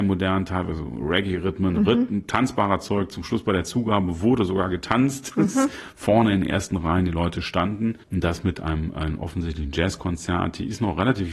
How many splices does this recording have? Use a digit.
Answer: 1